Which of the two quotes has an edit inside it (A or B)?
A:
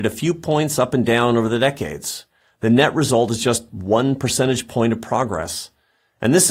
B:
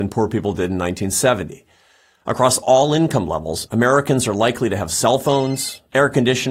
B